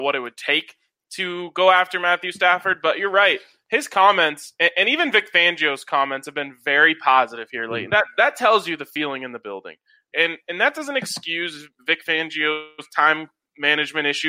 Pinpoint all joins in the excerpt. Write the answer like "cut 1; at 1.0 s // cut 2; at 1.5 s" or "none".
cut 1; at 7.9 s // cut 2; at 10.1 s